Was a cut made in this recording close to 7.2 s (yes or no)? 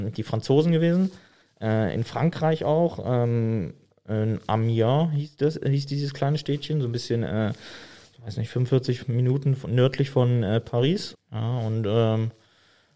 no